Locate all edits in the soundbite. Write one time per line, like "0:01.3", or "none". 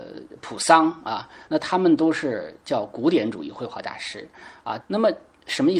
0:01.5
0:04.8